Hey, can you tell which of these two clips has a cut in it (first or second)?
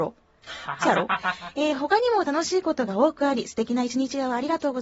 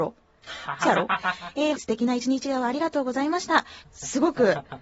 second